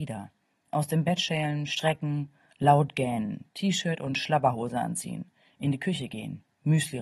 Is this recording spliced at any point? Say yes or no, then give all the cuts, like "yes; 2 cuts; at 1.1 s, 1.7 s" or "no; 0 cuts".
no; 0 cuts